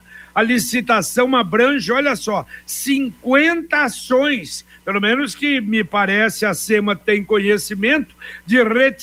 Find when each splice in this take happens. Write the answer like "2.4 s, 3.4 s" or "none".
none